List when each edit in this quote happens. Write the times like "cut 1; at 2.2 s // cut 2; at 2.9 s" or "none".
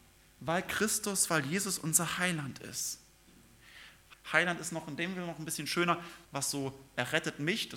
cut 1; at 4.1 s // cut 2; at 6.3 s